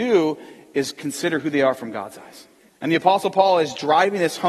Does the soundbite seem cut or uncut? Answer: cut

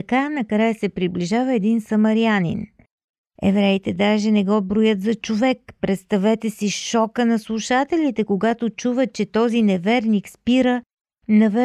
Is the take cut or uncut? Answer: uncut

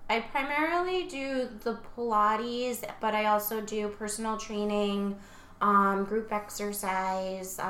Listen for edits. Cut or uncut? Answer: cut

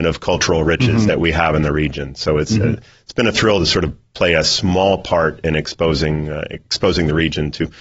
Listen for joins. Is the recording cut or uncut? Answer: uncut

